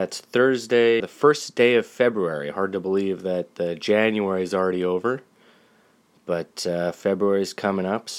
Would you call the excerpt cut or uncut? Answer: cut